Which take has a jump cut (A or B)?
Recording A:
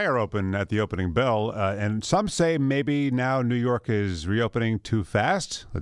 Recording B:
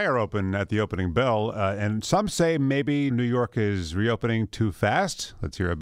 B